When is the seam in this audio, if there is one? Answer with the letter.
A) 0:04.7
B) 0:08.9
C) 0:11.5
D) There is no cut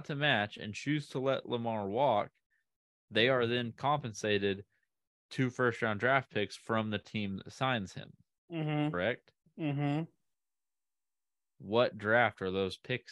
D